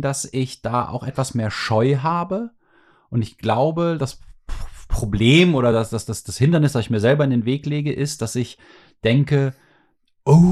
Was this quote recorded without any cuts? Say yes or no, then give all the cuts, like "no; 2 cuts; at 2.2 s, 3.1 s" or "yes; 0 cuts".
yes; 0 cuts